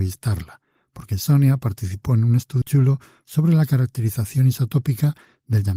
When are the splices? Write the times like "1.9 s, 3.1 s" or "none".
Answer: 2.6 s